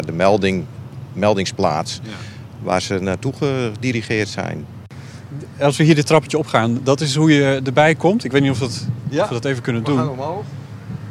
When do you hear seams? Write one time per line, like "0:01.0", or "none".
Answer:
none